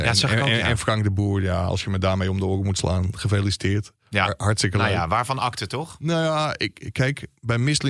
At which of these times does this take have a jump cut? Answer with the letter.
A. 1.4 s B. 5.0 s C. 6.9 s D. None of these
D